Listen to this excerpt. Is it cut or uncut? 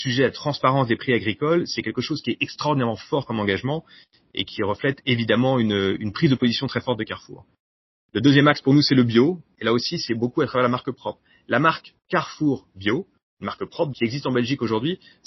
cut